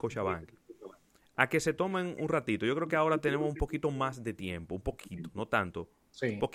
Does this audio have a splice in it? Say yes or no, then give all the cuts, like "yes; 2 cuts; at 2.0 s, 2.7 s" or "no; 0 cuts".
no; 0 cuts